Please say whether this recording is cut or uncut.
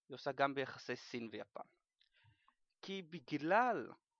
uncut